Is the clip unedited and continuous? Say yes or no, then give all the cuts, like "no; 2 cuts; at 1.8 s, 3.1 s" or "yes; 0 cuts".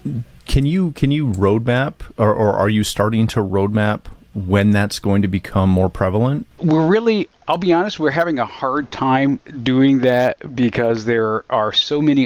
no; 1 cut; at 6.5 s